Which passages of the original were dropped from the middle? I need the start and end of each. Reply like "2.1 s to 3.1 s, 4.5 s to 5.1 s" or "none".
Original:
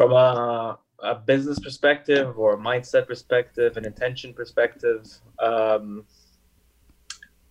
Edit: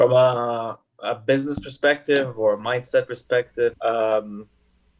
3.7 s to 5.3 s